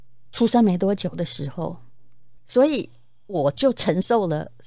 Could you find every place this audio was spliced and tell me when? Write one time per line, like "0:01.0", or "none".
0:02.4